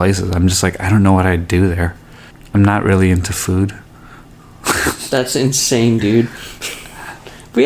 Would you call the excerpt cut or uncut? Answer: uncut